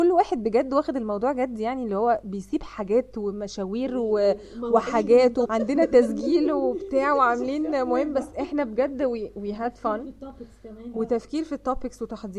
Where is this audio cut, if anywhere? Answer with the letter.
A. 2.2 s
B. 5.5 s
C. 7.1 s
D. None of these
B